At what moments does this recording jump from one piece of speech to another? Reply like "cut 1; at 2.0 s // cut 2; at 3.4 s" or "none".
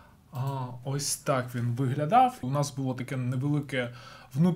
cut 1; at 2.4 s

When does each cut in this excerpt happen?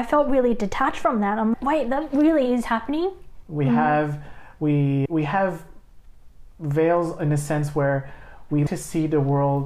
cut 1; at 3.4 s // cut 2; at 5.1 s

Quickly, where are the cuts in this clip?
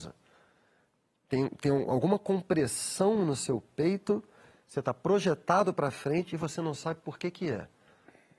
none

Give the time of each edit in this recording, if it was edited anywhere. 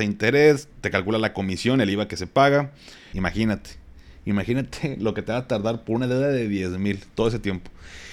cut 1; at 3.1 s

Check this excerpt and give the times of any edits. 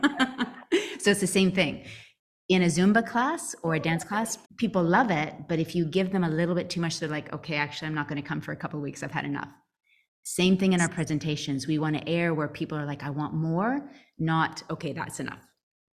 cut 1; at 4.5 s

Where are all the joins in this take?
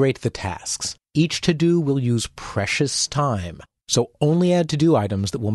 cut 1; at 1.0 s // cut 2; at 3.8 s

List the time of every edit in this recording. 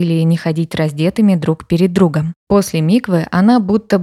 cut 1; at 2.4 s

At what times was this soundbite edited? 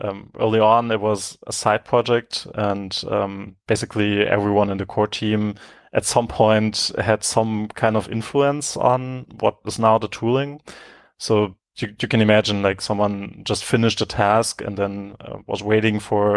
none

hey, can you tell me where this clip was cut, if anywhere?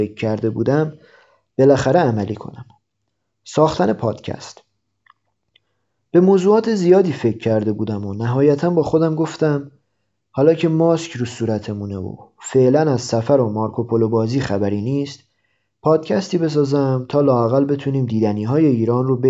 none

